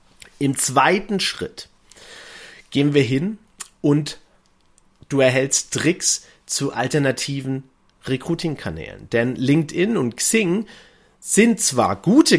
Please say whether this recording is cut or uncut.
uncut